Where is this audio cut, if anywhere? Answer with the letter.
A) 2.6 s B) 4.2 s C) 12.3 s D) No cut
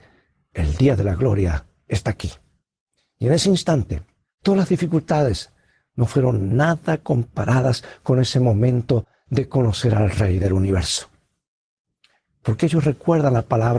B